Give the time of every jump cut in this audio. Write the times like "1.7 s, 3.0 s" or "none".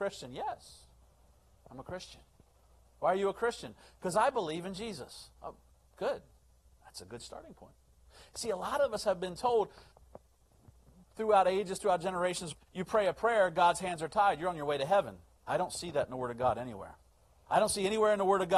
12.5 s, 17.5 s